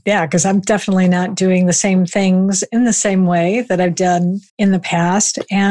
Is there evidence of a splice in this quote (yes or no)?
yes